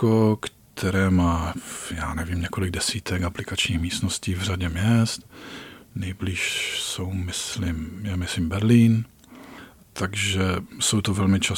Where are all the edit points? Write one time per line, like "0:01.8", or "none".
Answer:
0:09.8

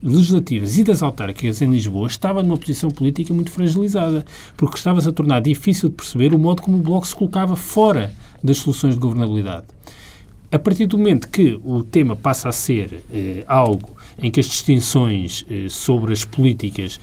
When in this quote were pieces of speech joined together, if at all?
none

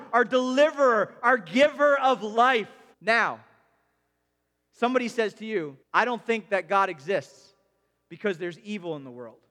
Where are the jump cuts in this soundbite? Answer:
0:02.9
0:05.8

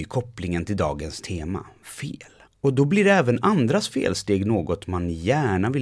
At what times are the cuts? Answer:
0:02.5

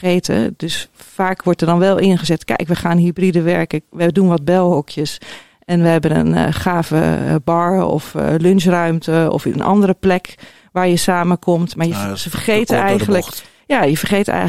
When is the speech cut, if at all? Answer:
none

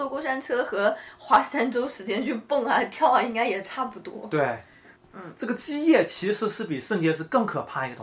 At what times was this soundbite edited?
0:05.0

